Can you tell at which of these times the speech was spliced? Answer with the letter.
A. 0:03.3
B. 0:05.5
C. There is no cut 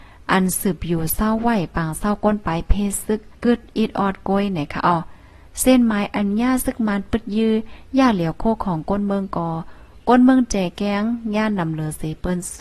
A